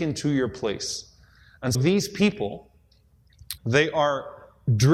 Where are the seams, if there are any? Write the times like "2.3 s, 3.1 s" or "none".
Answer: 1.7 s, 3.6 s